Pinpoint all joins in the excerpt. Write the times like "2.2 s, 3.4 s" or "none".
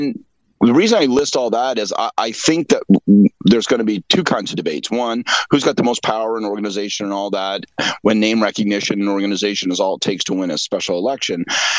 none